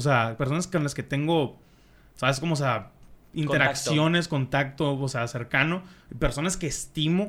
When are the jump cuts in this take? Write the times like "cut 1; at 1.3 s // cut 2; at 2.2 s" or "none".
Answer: none